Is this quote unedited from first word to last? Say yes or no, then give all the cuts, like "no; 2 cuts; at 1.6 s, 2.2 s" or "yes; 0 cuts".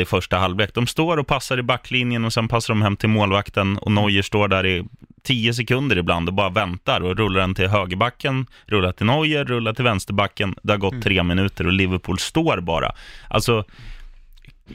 yes; 0 cuts